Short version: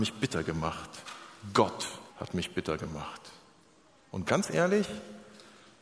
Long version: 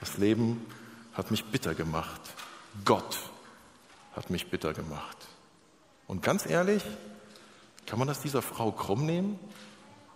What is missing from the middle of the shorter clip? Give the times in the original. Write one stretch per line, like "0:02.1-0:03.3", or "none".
0:03.4-0:04.0